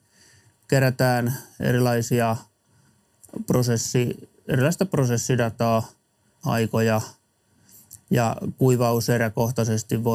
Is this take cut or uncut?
cut